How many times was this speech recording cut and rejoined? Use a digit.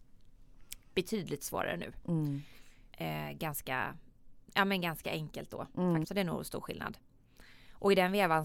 2